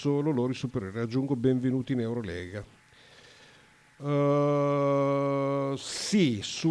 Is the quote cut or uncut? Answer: uncut